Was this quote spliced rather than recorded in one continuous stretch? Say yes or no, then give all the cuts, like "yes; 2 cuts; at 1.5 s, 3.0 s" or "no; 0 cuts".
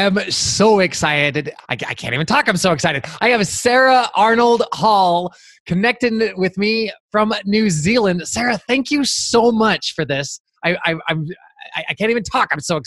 yes; 1 cut; at 1.6 s